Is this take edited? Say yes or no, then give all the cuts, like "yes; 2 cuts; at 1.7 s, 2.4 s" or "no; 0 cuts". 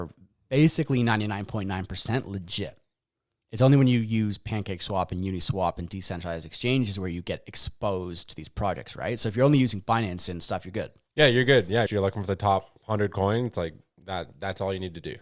yes; 1 cut; at 11.9 s